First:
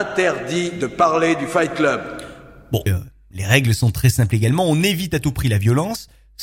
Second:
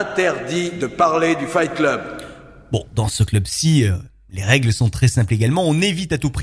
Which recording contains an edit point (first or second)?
first